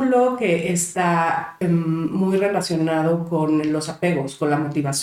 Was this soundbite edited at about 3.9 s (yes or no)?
no